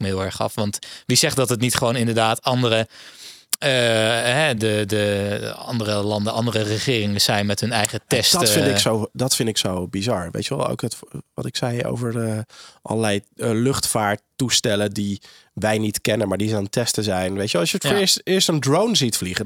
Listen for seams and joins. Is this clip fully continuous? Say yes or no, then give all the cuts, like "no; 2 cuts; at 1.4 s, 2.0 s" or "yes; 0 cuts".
no; 1 cut; at 4.6 s